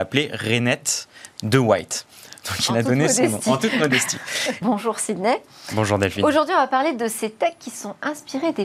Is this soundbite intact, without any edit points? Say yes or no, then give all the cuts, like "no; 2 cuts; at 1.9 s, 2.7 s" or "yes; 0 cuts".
no; 1 cut; at 4.6 s